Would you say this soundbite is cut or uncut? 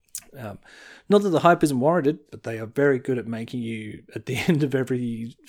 cut